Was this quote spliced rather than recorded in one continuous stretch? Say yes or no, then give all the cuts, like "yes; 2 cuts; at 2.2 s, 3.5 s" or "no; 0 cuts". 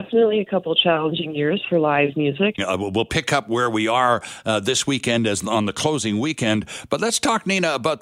yes; 1 cut; at 2.6 s